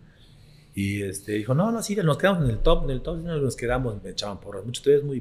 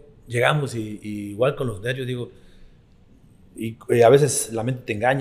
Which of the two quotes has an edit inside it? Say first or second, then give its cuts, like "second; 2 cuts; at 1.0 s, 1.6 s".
first; 1 cut; at 4.0 s